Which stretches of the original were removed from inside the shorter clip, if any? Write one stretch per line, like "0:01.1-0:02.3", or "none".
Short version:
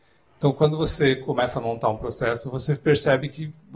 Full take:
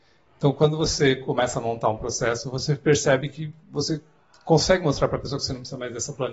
none

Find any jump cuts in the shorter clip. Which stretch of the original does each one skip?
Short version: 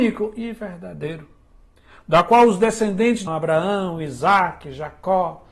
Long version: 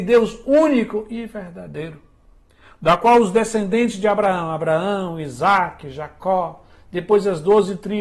0:04.0-0:04.5

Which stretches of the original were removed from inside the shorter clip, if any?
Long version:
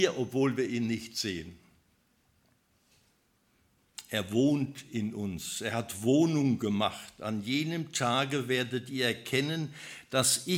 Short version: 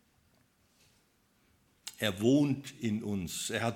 none

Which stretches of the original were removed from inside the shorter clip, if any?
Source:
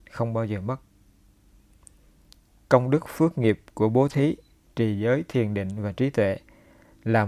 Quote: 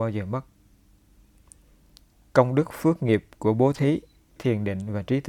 0:04.7-0:05.3

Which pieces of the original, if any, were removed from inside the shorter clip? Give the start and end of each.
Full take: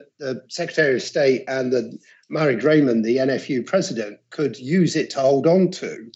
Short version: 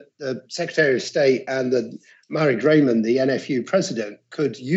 none

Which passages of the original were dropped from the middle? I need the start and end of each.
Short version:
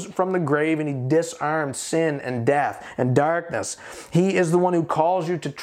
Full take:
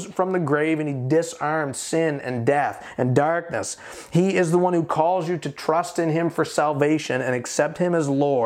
none

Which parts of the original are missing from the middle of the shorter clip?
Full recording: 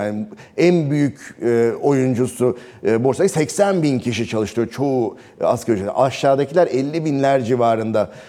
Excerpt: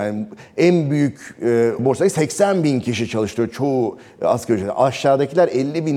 0:01.8-0:03.0

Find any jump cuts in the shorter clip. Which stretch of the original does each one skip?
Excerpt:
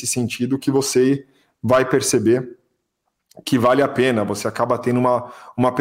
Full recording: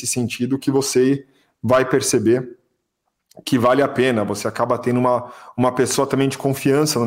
none

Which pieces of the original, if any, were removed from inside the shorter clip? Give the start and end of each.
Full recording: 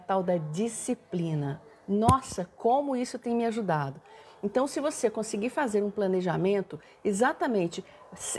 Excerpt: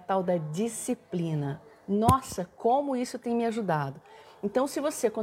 none

